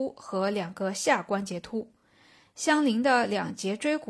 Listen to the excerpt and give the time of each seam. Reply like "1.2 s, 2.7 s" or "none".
none